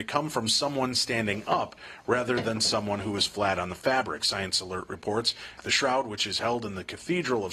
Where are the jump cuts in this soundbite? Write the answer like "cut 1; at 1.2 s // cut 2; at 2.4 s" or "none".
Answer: cut 1; at 5.6 s